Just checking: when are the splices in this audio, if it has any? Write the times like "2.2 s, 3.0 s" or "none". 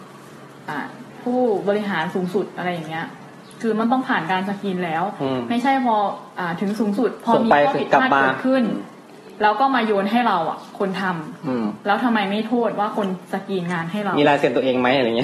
6.3 s